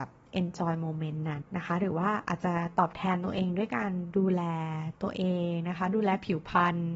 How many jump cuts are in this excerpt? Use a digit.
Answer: 1